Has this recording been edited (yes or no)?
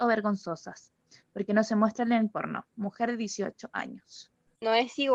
no